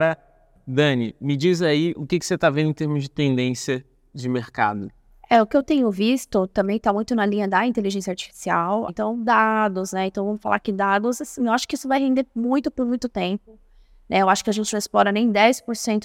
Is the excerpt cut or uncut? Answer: cut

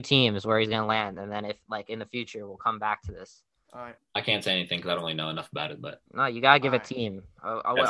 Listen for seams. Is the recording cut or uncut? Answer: cut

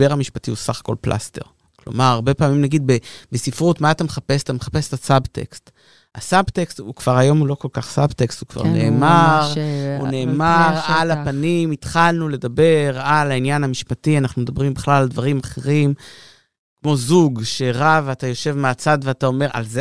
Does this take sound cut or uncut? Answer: uncut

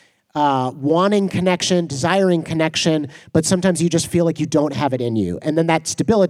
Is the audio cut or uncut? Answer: uncut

